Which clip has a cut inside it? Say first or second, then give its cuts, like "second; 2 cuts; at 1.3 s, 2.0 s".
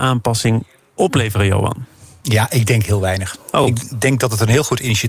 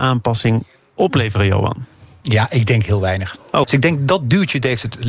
second; 1 cut; at 3.6 s